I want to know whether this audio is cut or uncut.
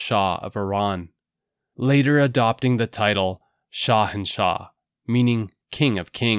uncut